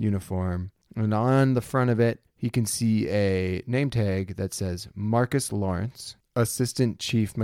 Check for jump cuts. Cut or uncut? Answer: uncut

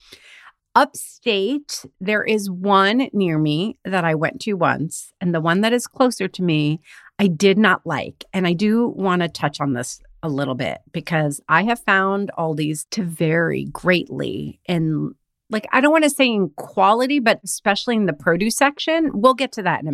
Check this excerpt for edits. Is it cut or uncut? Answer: uncut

